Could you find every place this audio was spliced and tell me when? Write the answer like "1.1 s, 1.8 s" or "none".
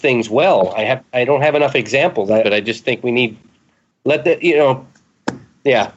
2.4 s